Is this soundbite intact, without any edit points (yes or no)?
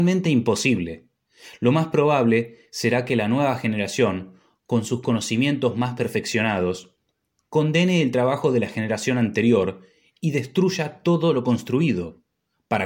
yes